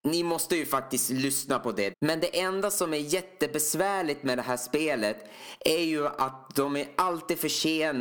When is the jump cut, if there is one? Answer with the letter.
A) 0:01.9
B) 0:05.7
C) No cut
A